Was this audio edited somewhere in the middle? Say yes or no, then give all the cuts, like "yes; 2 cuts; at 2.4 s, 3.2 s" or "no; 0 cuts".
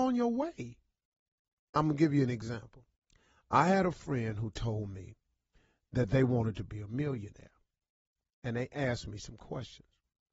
no; 0 cuts